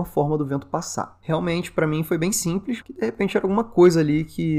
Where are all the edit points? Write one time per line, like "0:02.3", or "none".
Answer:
0:01.2
0:02.8